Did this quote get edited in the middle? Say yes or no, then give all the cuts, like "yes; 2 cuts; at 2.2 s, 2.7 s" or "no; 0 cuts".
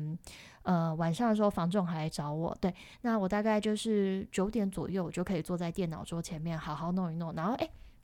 no; 0 cuts